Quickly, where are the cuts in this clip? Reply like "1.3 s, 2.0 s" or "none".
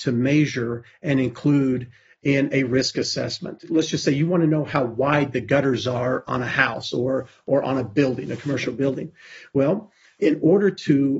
none